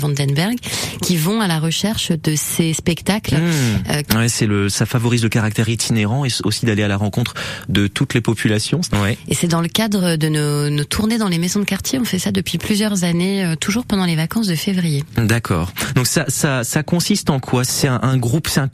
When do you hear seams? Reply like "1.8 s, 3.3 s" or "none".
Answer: 4.1 s, 8.8 s, 17.7 s